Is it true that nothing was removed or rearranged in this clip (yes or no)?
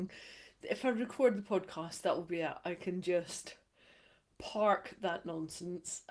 yes